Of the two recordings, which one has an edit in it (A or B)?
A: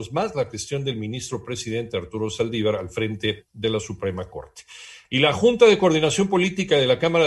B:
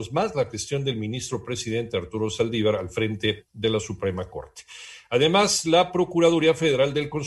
A